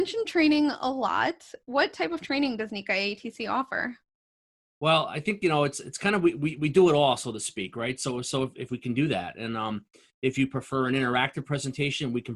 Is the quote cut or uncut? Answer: cut